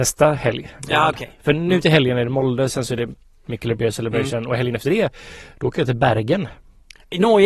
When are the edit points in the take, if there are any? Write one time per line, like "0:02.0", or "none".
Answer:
none